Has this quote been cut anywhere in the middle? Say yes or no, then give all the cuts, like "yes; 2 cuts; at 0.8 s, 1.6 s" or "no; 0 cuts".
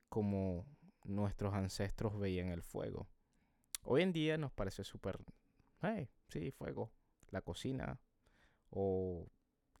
no; 0 cuts